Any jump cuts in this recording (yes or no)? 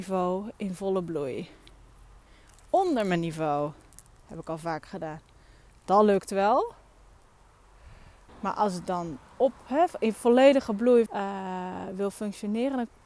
yes